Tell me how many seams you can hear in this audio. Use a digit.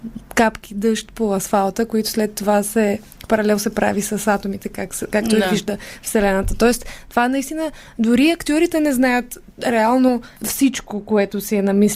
1